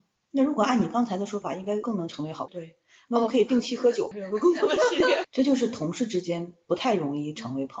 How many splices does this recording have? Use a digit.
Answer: 3